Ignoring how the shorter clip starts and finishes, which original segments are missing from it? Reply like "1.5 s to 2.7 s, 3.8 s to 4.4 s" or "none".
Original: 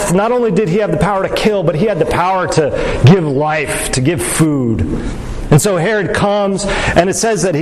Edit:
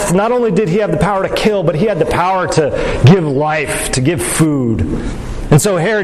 none